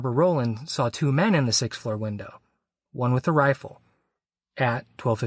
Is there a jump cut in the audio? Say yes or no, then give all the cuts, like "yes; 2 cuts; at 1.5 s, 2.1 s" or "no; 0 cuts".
no; 0 cuts